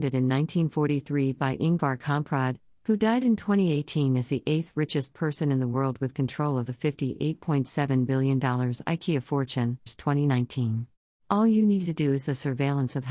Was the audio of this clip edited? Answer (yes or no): yes